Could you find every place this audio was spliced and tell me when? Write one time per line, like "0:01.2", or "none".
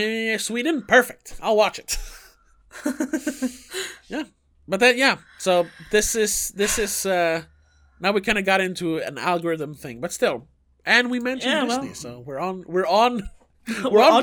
none